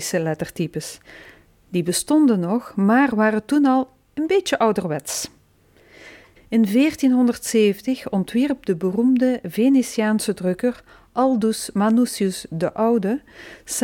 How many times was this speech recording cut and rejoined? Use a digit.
1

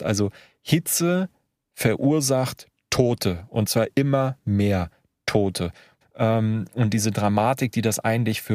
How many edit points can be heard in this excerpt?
1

